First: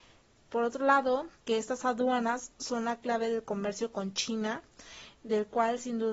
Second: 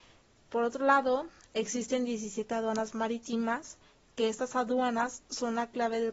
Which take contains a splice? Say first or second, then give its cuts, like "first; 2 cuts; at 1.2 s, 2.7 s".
first; 1 cut; at 1.4 s